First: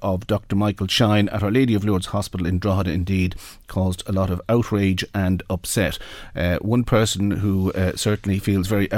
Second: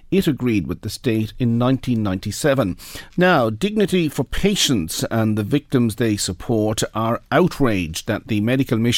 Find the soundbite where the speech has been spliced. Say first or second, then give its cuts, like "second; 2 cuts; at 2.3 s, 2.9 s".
second; 1 cut; at 3.1 s